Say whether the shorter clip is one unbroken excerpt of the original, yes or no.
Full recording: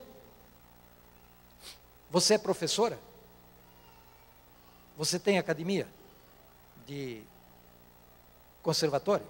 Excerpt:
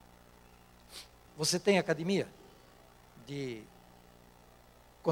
no